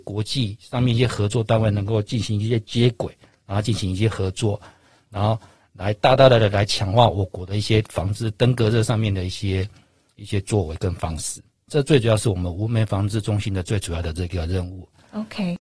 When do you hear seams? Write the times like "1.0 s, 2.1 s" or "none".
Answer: 11.7 s